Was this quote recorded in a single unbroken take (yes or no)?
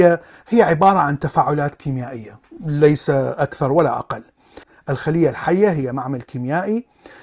yes